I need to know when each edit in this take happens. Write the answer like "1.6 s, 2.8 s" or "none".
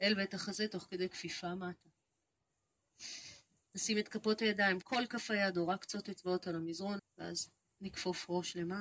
4.8 s, 7.0 s